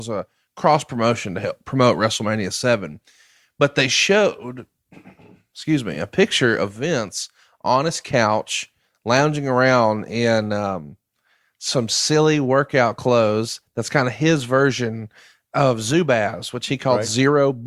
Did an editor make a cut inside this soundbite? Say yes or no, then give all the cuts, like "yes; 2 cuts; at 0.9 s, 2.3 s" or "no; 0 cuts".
no; 0 cuts